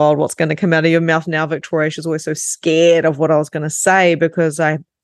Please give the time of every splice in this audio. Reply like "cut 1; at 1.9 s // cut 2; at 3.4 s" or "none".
none